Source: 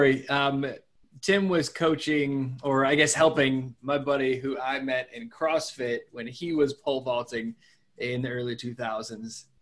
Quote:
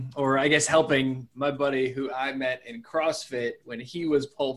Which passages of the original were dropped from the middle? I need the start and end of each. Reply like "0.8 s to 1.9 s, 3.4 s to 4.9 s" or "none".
none